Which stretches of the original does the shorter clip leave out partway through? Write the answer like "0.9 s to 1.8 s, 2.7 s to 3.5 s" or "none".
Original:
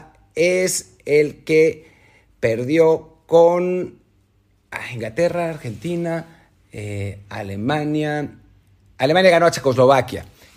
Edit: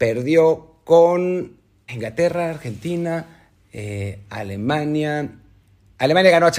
4.3 s to 4.9 s